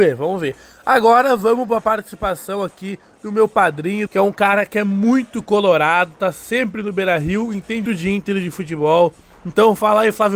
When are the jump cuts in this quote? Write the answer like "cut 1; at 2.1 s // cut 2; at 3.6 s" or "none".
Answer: cut 1; at 4.1 s // cut 2; at 7.9 s